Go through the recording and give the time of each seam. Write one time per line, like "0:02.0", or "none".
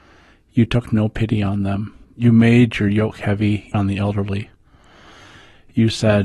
0:02.0
0:03.7

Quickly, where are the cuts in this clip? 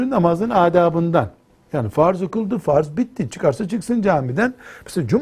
none

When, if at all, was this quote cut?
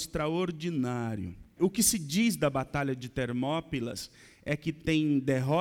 0:01.6

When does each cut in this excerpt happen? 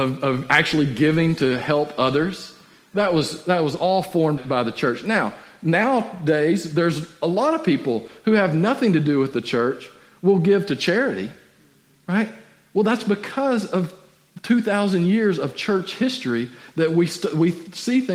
0:04.4

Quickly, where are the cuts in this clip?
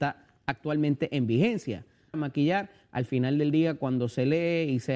0:02.1

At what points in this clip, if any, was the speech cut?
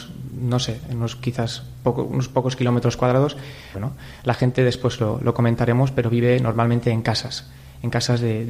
0:03.7

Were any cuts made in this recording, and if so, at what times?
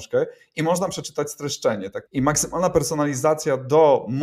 0:02.1

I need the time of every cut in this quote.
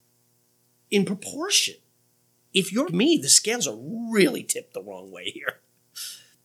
0:02.9

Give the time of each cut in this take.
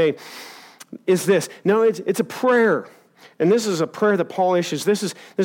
none

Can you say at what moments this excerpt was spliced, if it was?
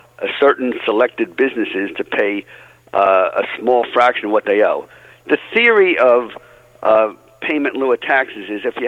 none

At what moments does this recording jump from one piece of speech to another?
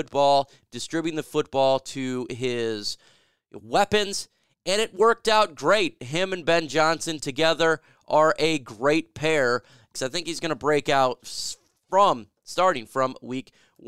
0:09.9

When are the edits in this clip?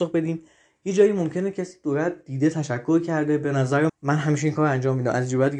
0:03.9

